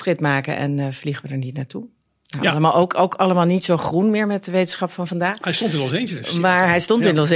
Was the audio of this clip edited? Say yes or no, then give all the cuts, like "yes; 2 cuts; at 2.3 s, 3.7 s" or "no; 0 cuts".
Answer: no; 0 cuts